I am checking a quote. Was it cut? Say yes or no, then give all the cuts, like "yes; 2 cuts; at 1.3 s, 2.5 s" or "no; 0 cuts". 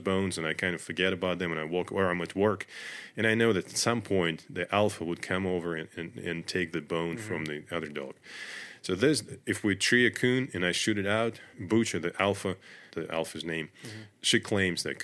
yes; 2 cuts; at 11.5 s, 12.9 s